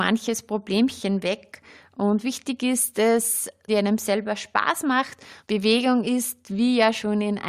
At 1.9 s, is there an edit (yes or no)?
no